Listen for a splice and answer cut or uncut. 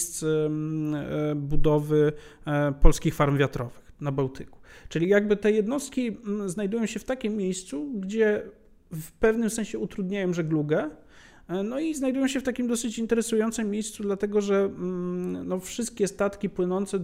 uncut